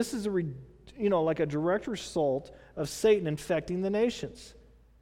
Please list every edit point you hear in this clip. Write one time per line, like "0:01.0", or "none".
none